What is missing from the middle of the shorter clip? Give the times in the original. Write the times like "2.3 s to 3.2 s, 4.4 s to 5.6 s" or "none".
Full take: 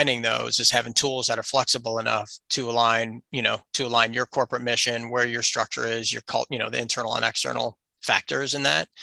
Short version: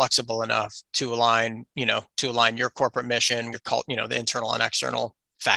5.1 s to 6.1 s